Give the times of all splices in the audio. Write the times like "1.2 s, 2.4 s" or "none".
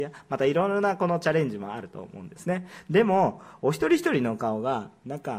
none